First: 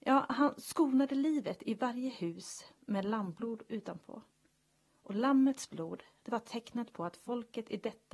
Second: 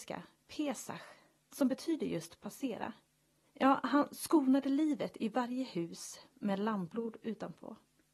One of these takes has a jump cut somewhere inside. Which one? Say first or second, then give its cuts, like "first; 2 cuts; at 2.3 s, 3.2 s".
second; 1 cut; at 3.5 s